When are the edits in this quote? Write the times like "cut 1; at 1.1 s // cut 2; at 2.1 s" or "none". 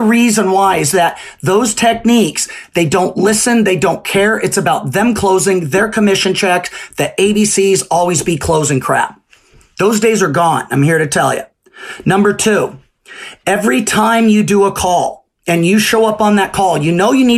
none